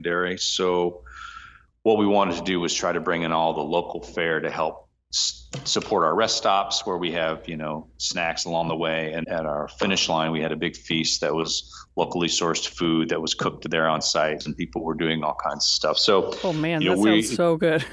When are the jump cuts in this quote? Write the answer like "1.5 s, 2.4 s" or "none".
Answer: 9.2 s